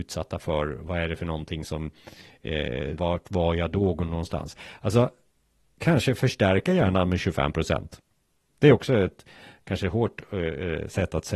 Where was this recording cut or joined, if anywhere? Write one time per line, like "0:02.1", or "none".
0:03.0

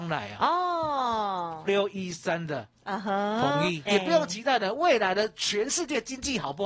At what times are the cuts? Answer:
0:01.7
0:03.9

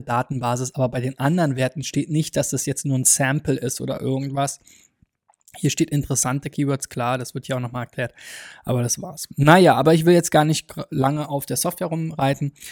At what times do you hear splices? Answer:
none

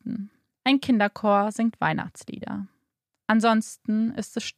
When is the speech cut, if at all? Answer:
none

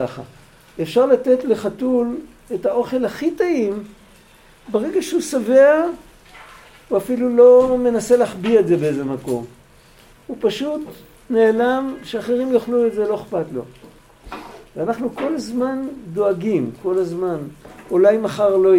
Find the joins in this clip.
none

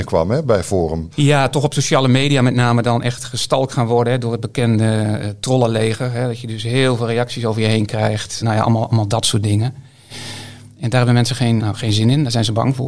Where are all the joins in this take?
0:01.1
0:08.4
0:11.6

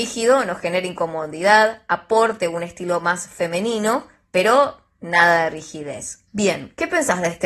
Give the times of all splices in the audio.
0:06.3

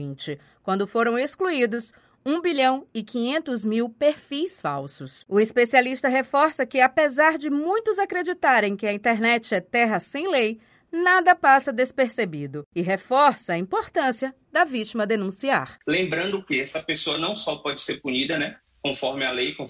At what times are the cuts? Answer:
0:05.3

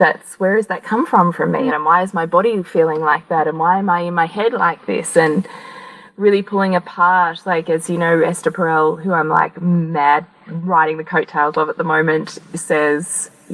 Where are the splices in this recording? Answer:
0:01.7

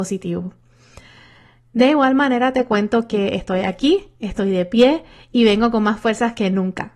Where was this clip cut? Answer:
none

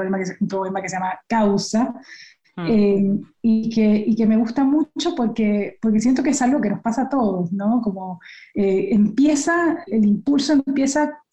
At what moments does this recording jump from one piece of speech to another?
0:09.9

